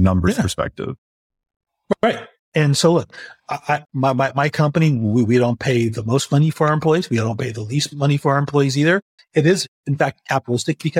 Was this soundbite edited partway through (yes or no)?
yes